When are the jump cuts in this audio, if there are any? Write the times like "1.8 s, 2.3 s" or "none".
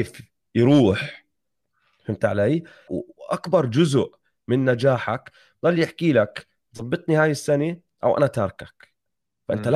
2.9 s